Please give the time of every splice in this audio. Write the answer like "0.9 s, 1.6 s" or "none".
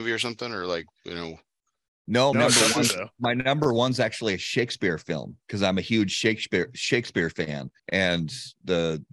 2.3 s, 7.8 s